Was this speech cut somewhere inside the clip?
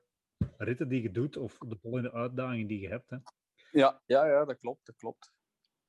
no; 0 cuts

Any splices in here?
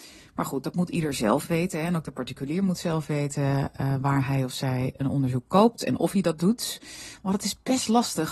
no; 0 cuts

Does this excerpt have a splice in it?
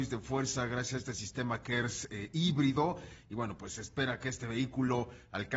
no; 0 cuts

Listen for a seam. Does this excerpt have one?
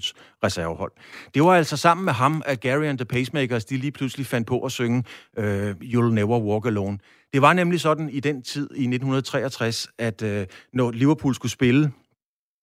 no; 0 cuts

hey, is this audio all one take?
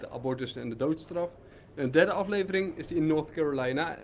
yes; 0 cuts

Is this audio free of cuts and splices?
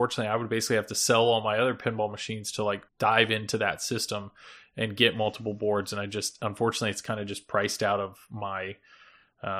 no; 1 cut; at 2.9 s

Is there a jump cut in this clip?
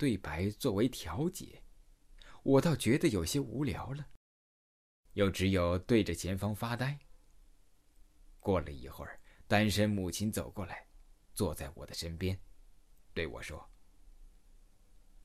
no; 0 cuts

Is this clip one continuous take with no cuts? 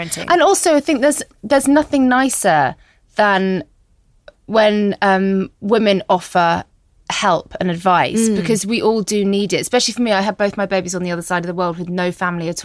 yes; 0 cuts

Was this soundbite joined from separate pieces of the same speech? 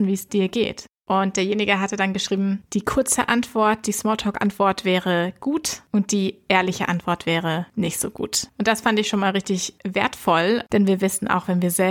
yes; 1 cut; at 10.7 s

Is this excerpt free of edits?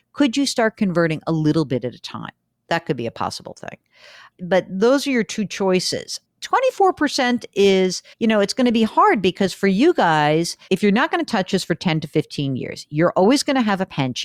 no; 2 cuts; at 8.1 s, 10.7 s

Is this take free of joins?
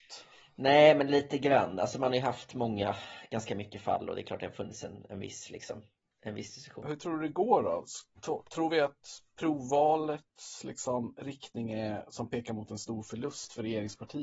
yes; 0 cuts

